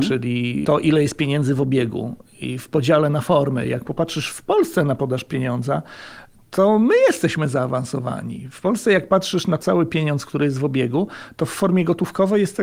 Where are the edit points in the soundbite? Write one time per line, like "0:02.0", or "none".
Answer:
none